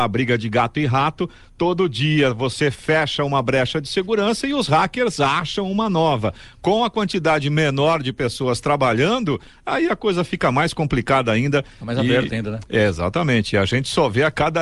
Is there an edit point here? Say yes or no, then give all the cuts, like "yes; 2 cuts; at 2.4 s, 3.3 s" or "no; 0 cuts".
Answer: no; 0 cuts